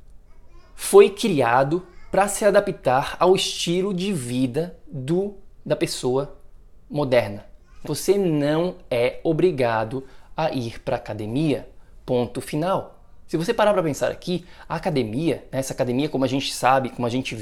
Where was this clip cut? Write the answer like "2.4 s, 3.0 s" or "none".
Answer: 7.8 s